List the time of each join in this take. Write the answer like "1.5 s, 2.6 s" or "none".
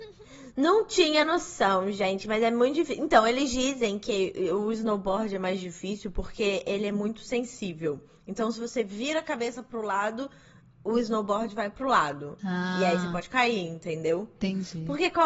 none